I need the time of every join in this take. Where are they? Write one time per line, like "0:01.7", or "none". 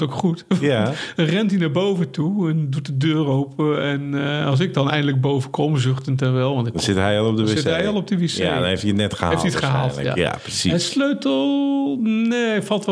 none